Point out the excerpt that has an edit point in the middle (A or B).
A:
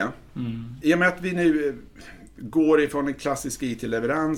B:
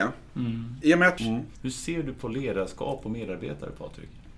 B